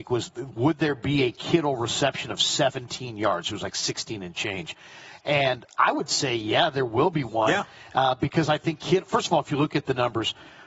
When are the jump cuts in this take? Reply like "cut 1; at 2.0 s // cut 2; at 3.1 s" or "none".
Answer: none